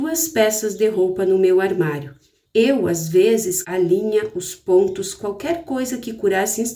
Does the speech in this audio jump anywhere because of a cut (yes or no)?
yes